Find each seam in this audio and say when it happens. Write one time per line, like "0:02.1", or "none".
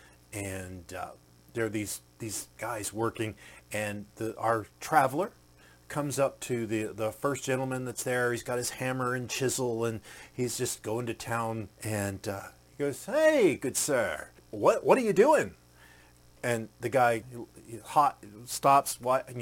0:11.7
0:14.4
0:17.2